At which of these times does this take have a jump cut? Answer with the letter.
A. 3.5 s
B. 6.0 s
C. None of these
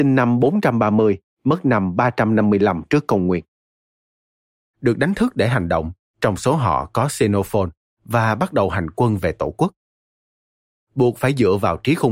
B